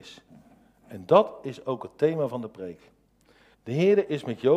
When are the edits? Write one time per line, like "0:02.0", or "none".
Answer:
0:03.5

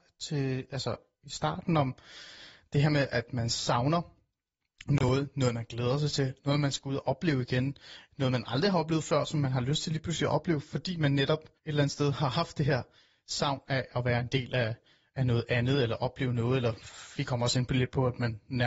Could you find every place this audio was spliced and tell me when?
0:11.6

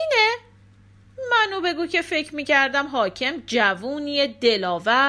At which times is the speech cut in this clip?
none

